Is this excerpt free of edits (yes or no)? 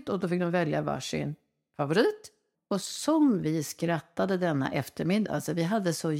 no